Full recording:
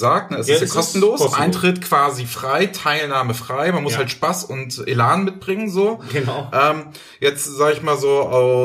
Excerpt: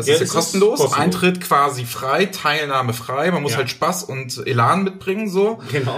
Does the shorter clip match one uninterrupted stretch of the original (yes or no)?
yes